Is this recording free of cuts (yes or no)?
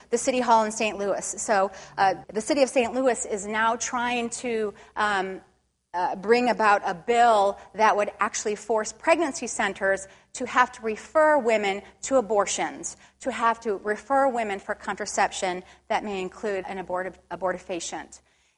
no